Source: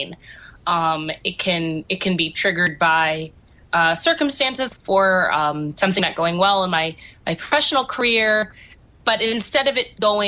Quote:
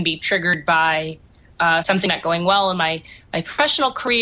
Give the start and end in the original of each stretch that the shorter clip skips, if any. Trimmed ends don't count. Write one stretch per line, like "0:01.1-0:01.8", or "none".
0:04.0-0:05.8